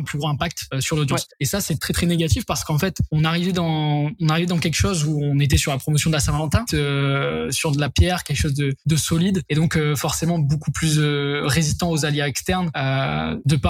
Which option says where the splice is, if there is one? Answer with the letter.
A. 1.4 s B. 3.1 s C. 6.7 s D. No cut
C